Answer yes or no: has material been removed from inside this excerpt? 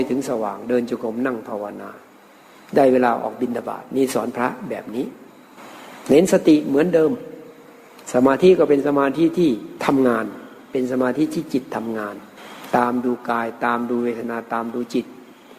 no